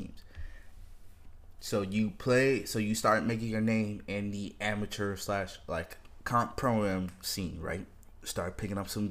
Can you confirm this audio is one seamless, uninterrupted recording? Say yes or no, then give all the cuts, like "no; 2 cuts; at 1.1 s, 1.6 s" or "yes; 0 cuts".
yes; 0 cuts